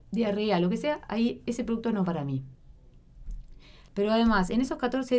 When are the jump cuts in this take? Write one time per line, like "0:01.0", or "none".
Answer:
0:02.1
0:03.9